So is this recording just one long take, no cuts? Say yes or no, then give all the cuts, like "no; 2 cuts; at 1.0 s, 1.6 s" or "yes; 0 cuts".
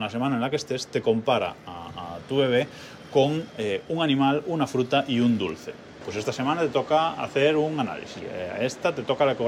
no; 2 cuts; at 6.0 s, 8.2 s